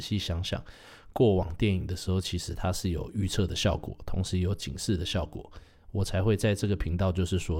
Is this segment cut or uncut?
uncut